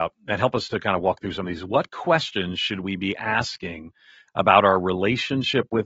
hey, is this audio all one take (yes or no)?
yes